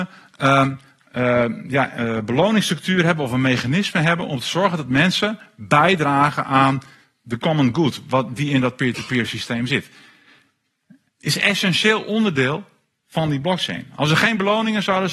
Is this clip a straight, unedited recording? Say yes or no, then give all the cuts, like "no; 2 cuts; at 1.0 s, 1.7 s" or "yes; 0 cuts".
no; 1 cut; at 11.1 s